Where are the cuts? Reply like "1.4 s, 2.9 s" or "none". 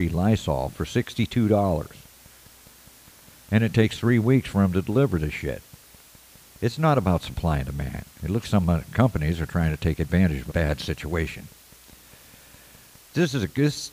8.4 s, 10.5 s